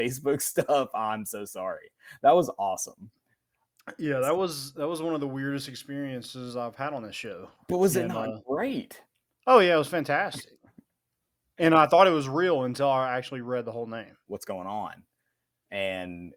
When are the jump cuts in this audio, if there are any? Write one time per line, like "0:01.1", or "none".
0:14.3